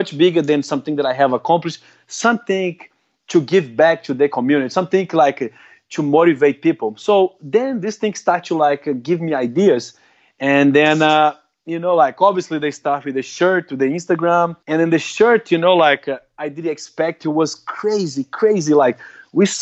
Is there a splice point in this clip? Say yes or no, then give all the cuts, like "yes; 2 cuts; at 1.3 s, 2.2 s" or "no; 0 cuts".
yes; 1 cut; at 14.6 s